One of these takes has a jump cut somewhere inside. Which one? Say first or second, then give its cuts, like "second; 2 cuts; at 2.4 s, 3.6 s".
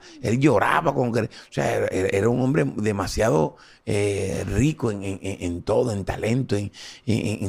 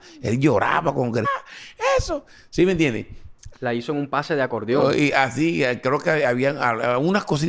second; 2 cuts; at 1.2 s, 3.5 s